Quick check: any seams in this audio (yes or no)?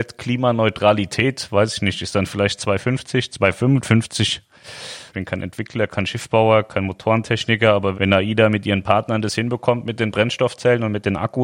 yes